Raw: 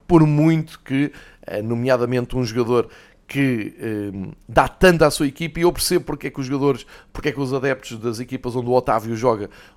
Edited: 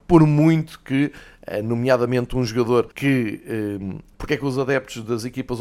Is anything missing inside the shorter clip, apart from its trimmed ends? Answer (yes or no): yes